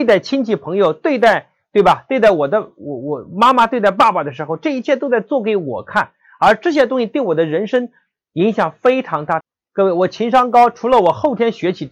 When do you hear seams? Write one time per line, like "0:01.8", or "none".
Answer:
0:09.4